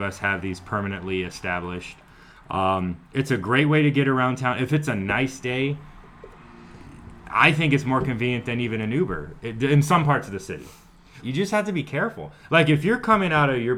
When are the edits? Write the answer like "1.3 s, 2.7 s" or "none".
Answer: 11.2 s, 12.5 s